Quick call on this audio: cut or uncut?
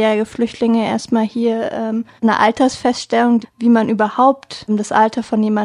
cut